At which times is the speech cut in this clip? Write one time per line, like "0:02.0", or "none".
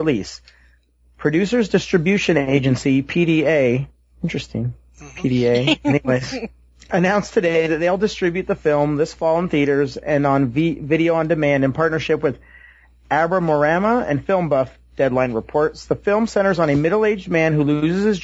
0:06.9